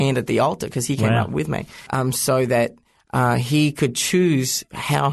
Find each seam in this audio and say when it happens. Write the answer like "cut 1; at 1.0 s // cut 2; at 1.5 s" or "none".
cut 1; at 1.9 s

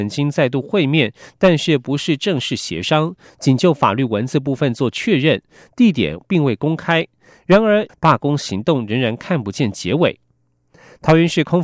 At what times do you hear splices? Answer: cut 1; at 7.9 s

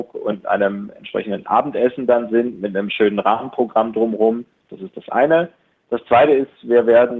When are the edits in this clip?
none

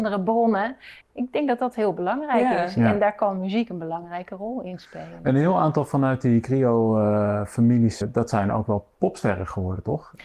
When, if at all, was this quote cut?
cut 1; at 1.0 s // cut 2; at 8.0 s

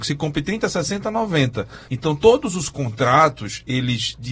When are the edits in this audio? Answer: cut 1; at 1.9 s

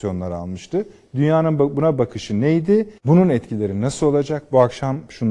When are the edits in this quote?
cut 1; at 3.0 s

